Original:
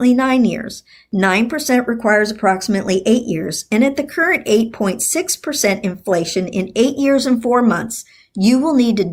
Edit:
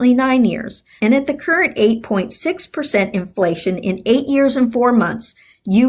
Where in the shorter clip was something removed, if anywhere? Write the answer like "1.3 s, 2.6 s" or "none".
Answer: 1.0 s